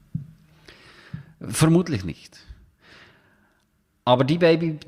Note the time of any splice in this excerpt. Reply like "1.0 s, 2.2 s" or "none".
none